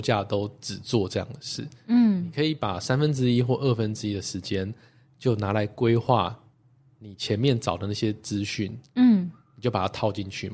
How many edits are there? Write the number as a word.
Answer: zero